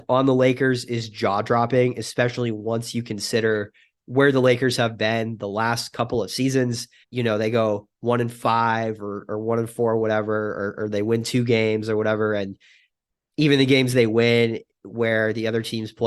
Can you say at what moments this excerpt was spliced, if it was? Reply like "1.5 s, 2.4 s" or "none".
7.0 s